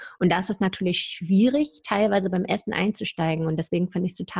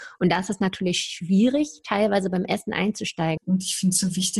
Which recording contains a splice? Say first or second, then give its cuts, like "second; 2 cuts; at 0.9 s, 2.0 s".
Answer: second; 1 cut; at 3.4 s